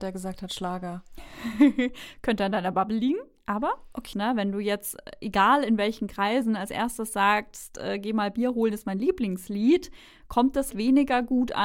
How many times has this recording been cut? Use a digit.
2